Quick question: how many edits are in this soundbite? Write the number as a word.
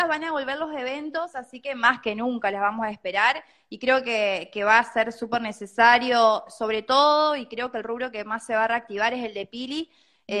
zero